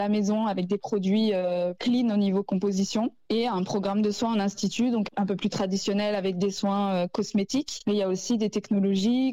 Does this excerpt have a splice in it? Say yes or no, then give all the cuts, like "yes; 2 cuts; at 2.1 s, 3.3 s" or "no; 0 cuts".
no; 0 cuts